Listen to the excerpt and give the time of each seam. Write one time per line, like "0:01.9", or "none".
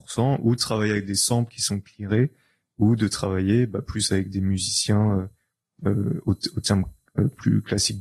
none

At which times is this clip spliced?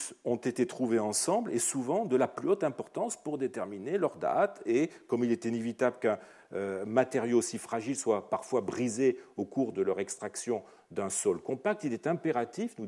none

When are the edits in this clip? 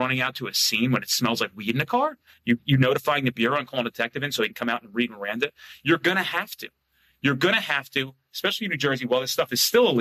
none

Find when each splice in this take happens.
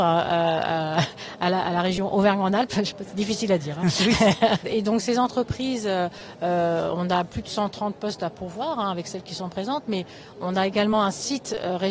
0:04.6

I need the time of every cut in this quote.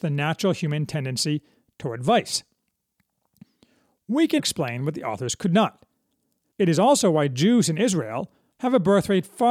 0:04.4
0:06.4
0:08.5

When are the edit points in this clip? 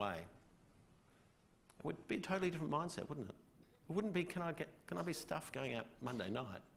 none

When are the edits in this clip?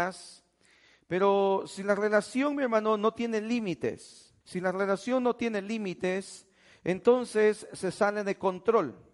0:04.4

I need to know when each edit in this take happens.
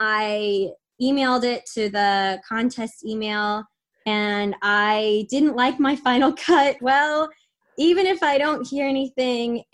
0:06.8

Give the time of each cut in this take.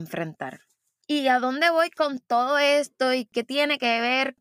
none

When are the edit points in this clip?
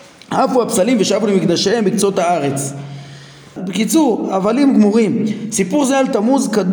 0:03.6

